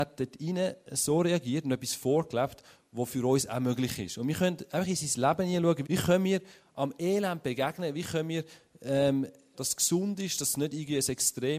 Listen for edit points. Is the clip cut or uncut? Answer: cut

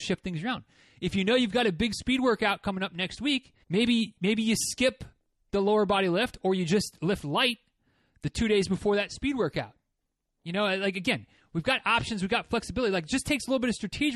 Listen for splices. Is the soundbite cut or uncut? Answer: cut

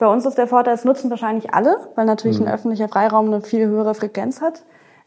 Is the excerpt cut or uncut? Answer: uncut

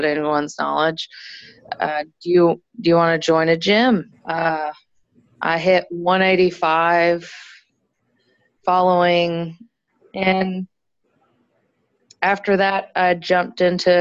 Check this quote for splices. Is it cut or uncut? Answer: cut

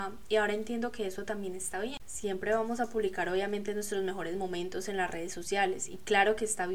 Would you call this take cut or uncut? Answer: cut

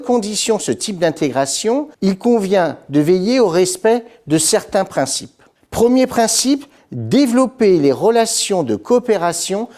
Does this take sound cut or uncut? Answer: cut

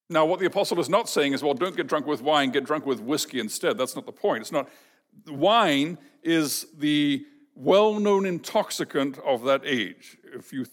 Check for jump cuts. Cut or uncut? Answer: uncut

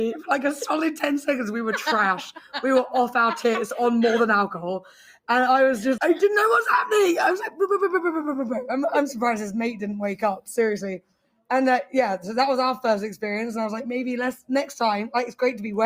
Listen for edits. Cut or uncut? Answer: cut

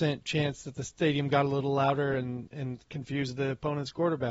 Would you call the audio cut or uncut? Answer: uncut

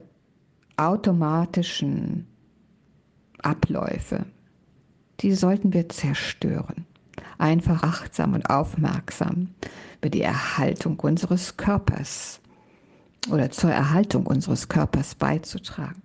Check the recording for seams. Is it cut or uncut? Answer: cut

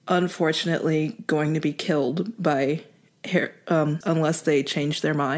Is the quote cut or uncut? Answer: cut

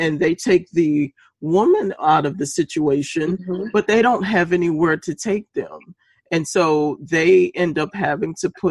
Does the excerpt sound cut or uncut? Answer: uncut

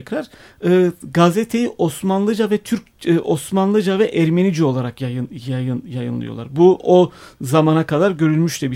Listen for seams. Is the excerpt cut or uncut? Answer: uncut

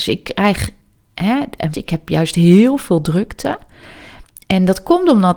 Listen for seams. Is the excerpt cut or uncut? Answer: cut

